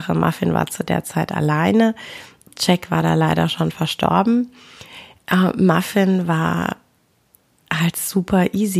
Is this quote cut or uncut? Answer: uncut